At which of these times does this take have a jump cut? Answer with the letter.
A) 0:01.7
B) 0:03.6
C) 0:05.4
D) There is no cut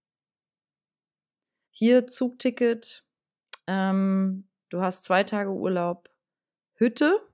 A